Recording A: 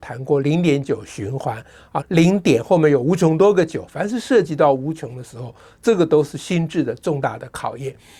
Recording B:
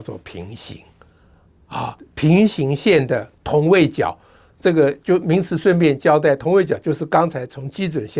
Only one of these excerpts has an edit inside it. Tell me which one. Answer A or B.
A